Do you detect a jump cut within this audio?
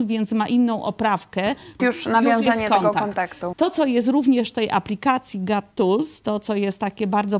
yes; 2 cuts; at 1.8 s, 3.5 s

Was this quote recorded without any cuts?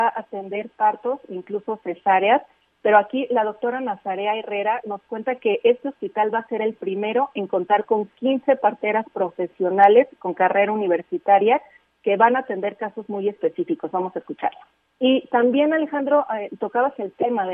no; 1 cut; at 14.8 s

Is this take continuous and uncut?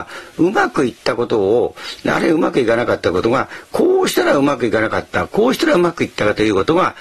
yes; 0 cuts

